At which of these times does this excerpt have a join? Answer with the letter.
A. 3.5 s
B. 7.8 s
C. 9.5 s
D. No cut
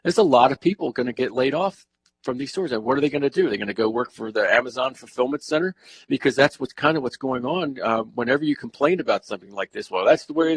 D